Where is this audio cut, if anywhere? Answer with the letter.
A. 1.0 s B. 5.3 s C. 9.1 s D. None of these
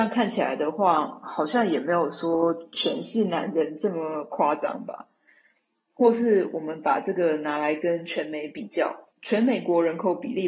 C